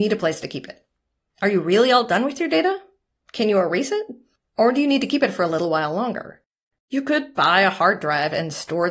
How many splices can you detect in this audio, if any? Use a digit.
1